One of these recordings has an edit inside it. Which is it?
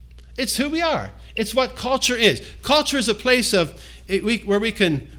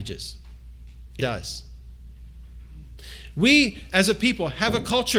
second; 1 cut; at 1.2 s

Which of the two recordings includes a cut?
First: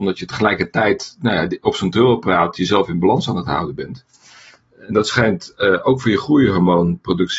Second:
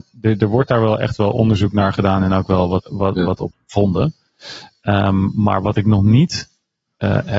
second; 1 cut; at 2.8 s

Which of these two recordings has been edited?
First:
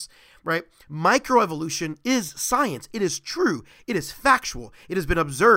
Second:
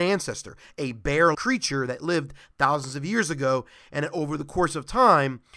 second; 1 cut; at 1.3 s

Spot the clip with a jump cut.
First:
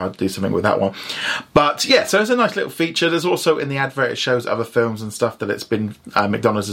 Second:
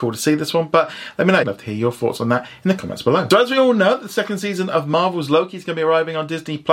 second; 1 cut; at 1.4 s

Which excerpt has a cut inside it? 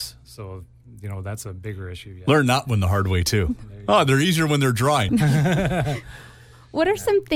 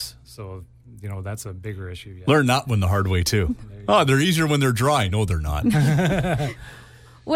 first; 1 cut; at 5.1 s

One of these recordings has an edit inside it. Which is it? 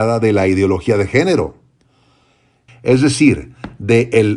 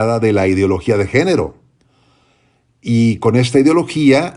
first; 1 cut; at 2.7 s

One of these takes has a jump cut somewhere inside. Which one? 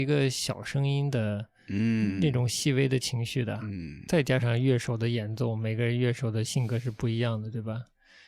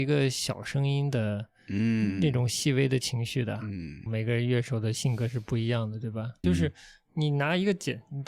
second; 2 cuts; at 4.1 s, 6.4 s

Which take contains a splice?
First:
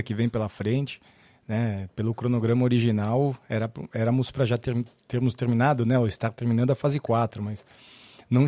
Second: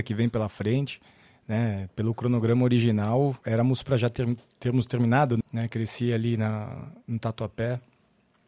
second; 2 cuts; at 3.4 s, 5.4 s

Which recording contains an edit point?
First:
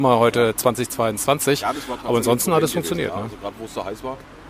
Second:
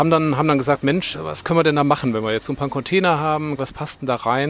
second; 2 cuts; at 1.1 s, 3.6 s

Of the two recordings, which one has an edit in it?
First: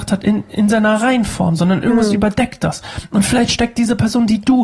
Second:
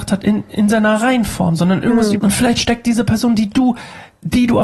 second; 1 cut; at 2.2 s

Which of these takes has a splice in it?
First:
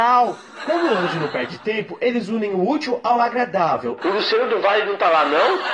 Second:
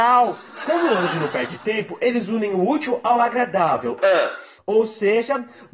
first; 1 cut; at 4.0 s

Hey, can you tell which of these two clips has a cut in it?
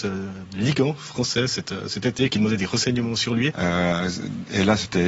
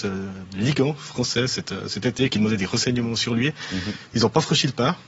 first; 1 cut; at 3.5 s

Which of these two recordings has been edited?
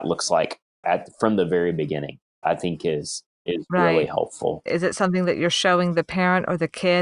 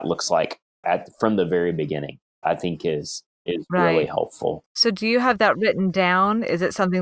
first; 1 cut; at 4.7 s

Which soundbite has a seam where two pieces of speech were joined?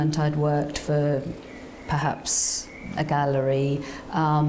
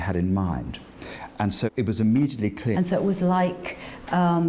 second; 2 cuts; at 1.7 s, 2.7 s

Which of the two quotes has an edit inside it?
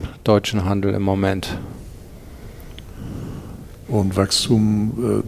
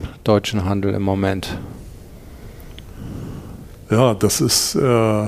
first; 1 cut; at 3.8 s

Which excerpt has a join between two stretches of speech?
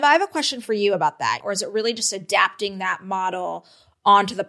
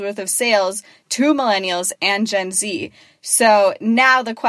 first; 1 cut; at 1.4 s

